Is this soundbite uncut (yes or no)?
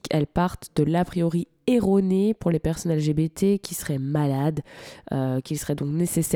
yes